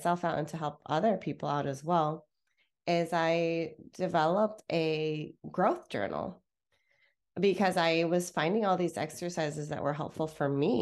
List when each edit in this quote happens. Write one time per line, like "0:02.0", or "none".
0:05.4